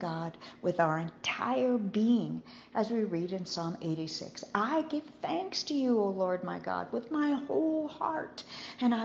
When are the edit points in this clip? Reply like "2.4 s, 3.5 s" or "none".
none